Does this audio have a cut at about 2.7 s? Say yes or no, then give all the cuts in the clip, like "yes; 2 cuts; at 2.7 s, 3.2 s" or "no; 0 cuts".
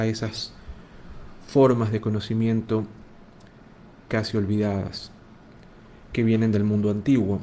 no; 1 cut; at 4.1 s